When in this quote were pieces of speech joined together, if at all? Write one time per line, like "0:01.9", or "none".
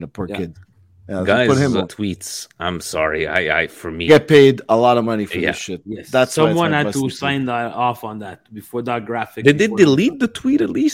0:01.8
0:04.1